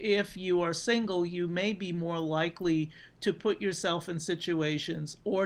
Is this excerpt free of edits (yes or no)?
yes